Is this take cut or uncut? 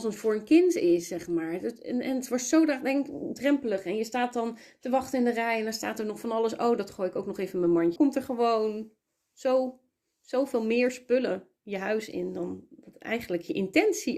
cut